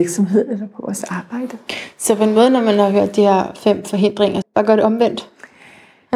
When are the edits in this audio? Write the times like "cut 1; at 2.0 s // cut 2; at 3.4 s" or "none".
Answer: cut 1; at 4.4 s